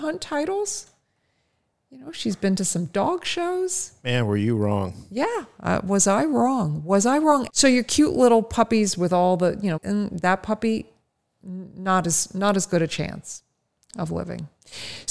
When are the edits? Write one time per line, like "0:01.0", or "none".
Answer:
0:07.5
0:09.8